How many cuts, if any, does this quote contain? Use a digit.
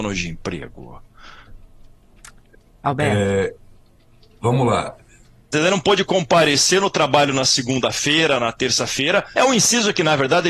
2